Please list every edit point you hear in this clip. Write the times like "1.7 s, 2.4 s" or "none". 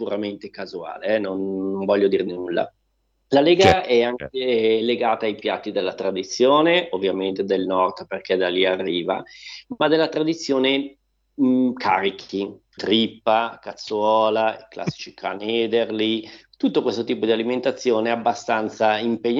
12.8 s